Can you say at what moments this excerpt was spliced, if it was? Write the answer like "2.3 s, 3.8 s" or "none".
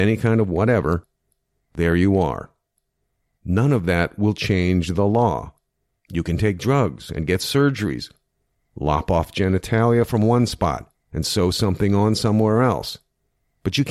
1.6 s, 6.0 s